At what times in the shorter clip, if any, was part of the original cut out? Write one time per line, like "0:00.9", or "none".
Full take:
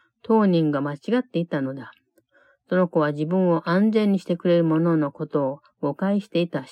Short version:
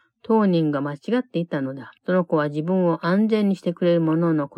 0:02.0